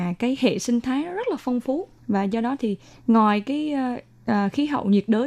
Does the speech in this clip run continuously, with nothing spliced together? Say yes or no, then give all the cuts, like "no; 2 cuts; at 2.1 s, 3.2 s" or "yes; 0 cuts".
no; 1 cut; at 2.0 s